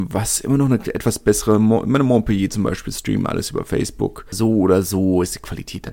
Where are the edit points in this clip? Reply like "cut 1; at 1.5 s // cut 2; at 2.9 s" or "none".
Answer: cut 1; at 4.3 s